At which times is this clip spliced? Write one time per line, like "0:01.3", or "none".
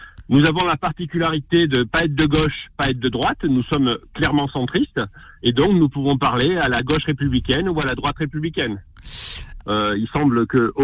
0:09.6